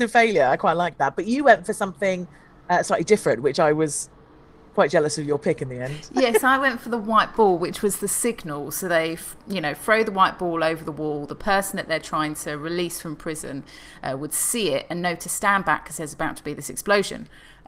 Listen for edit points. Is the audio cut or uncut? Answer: uncut